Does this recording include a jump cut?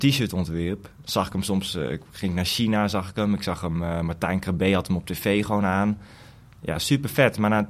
no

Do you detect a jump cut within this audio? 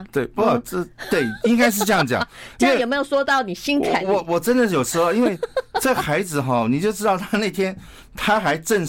no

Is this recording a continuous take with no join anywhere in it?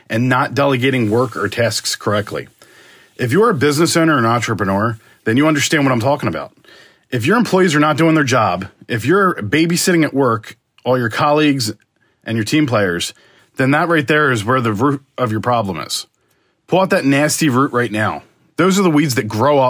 no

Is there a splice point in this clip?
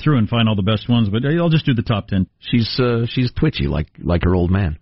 yes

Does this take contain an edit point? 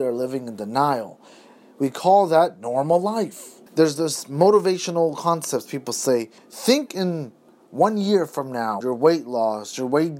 yes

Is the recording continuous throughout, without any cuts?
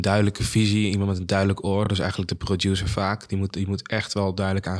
yes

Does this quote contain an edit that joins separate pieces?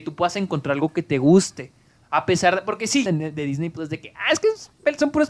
yes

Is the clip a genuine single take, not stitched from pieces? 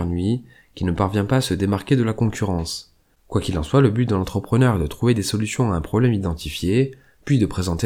no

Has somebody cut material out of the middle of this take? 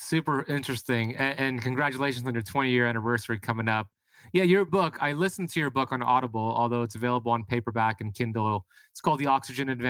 no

